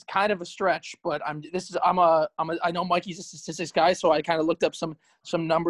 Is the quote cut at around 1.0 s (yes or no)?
no